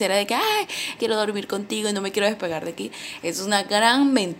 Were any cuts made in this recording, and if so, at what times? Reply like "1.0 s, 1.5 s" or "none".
1.0 s